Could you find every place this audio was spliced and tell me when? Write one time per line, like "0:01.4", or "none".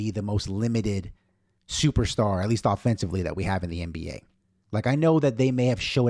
0:04.6